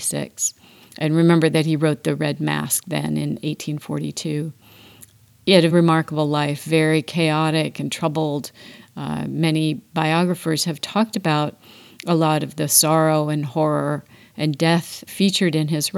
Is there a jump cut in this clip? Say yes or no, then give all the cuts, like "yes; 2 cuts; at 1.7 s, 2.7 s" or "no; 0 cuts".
yes; 2 cuts; at 5.7 s, 15.1 s